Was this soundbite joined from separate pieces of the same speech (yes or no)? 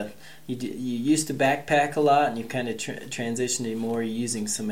no